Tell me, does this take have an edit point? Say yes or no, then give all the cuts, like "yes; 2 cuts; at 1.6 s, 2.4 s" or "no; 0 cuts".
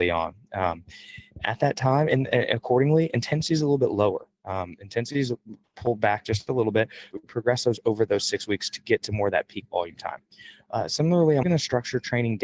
yes; 2 cuts; at 7.1 s, 11.4 s